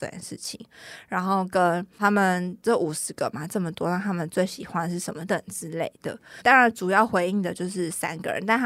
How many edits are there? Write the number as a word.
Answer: one